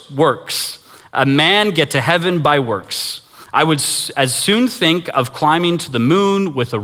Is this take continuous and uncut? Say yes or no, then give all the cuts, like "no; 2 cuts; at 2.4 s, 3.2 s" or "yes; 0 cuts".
yes; 0 cuts